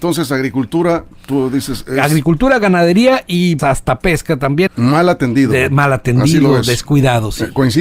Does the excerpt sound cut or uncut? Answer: cut